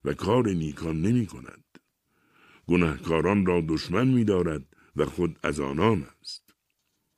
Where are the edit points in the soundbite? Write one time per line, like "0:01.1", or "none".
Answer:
none

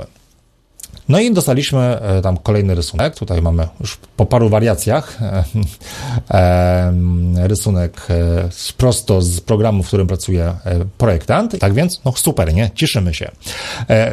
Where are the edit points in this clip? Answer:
0:01.0
0:11.6

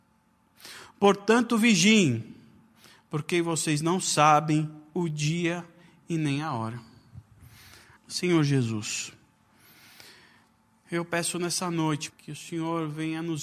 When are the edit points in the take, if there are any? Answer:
0:08.0
0:12.1

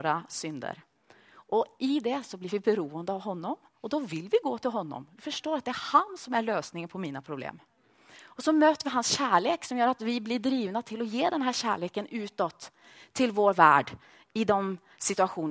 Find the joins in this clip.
none

